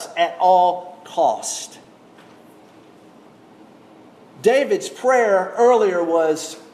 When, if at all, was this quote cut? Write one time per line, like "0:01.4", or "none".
none